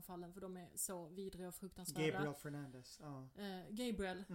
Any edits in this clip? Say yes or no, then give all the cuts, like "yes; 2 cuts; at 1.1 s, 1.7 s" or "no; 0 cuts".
no; 0 cuts